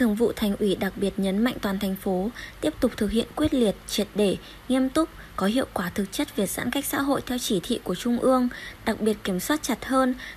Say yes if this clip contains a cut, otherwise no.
yes